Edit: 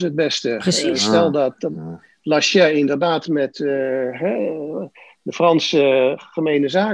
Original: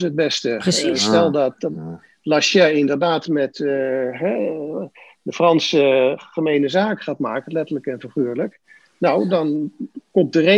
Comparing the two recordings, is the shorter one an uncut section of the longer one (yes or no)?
yes